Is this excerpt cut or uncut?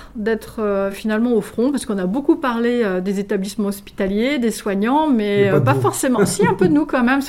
uncut